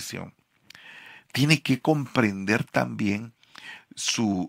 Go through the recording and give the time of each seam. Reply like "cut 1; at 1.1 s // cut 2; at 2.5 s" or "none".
none